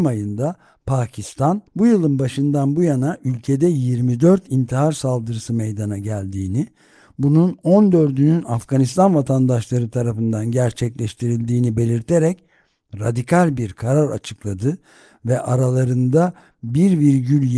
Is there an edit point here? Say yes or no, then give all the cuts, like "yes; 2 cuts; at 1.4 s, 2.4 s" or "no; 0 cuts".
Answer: yes; 1 cut; at 1.7 s